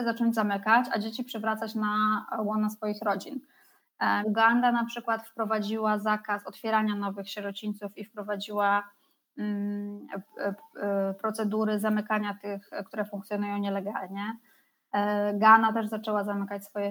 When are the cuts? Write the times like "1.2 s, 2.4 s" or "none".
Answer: 4.2 s